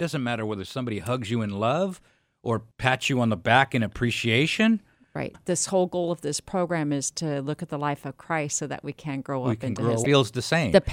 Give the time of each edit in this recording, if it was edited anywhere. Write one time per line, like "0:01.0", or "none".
0:02.7
0:05.3
0:10.0